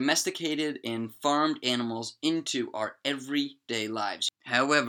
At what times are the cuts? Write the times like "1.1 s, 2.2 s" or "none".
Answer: none